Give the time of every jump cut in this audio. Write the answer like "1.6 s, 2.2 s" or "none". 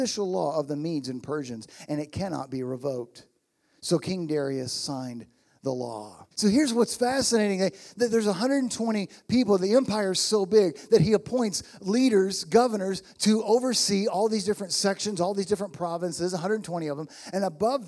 6.3 s